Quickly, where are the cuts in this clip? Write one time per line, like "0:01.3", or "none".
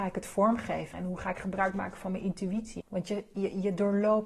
0:00.9
0:02.8